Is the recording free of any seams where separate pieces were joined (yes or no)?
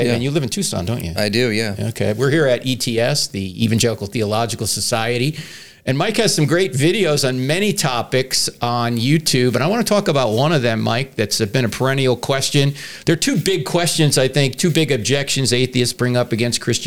yes